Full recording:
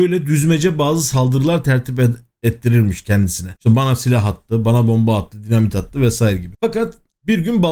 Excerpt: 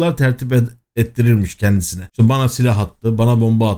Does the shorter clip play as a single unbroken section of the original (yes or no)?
yes